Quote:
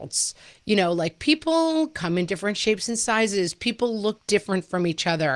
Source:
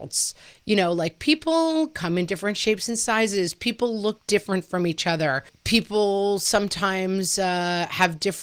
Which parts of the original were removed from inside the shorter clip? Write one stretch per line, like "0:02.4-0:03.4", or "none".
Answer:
none